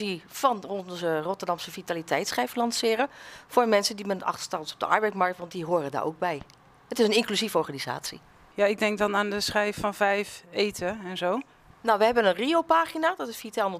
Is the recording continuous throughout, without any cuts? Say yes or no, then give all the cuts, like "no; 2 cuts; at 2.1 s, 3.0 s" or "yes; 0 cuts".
no; 2 cuts; at 8.5 s, 11.7 s